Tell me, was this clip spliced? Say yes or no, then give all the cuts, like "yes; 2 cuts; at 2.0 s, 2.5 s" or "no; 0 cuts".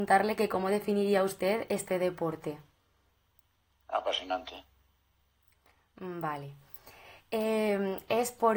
no; 0 cuts